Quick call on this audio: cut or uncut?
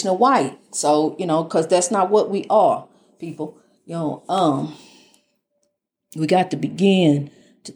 uncut